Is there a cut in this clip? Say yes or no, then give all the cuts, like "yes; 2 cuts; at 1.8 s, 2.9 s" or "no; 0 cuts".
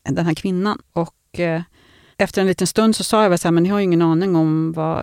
no; 0 cuts